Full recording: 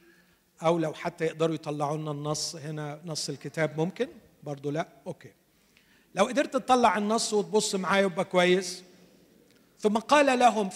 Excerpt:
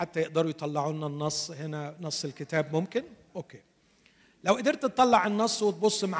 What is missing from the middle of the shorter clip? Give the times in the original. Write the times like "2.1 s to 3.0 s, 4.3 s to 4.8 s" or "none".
4.3 s to 5.0 s